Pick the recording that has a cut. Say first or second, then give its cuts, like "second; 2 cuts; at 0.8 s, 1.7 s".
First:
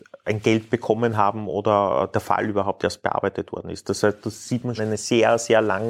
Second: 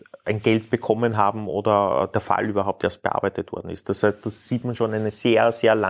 first; 1 cut; at 4.8 s